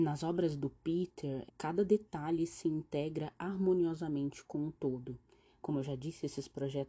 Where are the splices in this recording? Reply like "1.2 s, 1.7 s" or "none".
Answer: 1.5 s, 5.6 s